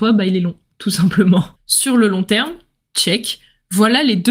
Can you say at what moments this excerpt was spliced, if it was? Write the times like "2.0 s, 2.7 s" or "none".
1.6 s